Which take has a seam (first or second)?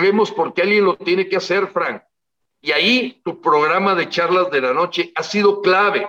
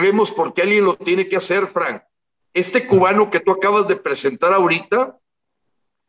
first